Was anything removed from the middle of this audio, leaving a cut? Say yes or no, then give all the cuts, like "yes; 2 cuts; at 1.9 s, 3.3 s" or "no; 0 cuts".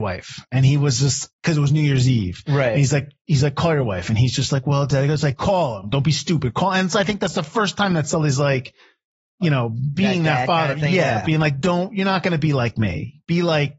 yes; 1 cut; at 1.3 s